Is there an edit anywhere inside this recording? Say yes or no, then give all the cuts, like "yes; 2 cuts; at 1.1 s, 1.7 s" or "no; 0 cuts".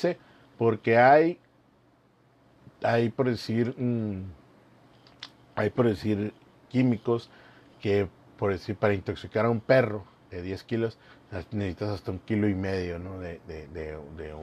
no; 0 cuts